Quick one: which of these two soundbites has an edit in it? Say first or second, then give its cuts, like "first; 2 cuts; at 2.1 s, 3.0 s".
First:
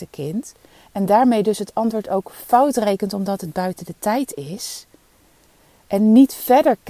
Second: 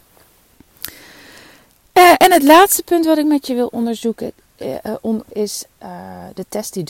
second; 1 cut; at 5.3 s